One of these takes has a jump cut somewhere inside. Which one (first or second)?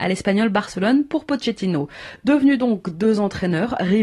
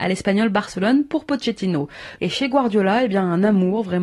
second